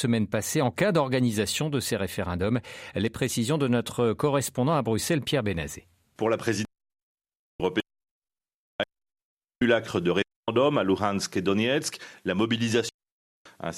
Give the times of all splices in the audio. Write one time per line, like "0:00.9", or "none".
none